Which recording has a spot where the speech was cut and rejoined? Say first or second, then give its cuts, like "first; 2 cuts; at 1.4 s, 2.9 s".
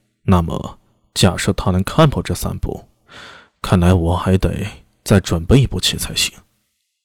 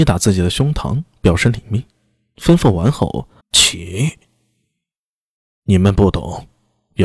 second; 1 cut; at 3.4 s